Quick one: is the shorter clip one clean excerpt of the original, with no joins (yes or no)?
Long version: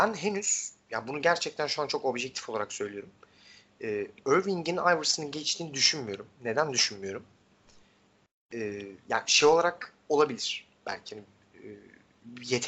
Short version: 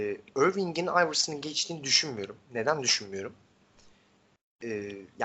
yes